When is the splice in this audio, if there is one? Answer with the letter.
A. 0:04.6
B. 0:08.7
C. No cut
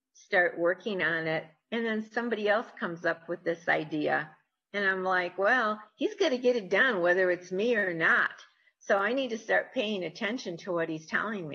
C